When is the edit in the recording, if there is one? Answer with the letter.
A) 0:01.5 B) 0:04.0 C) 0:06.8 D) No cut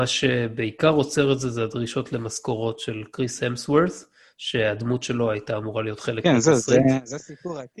D